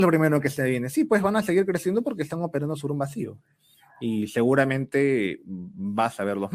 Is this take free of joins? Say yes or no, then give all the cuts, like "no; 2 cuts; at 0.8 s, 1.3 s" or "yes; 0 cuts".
yes; 0 cuts